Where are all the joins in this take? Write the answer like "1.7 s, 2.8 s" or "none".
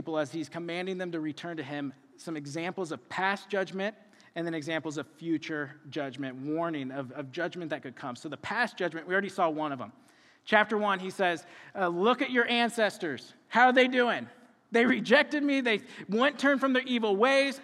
none